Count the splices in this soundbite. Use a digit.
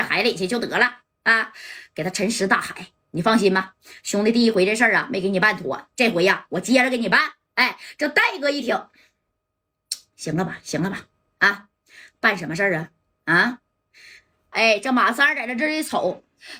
1